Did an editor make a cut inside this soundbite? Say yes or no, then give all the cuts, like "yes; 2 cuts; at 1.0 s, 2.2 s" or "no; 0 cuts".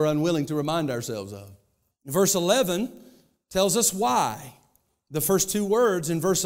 yes; 1 cut; at 1.9 s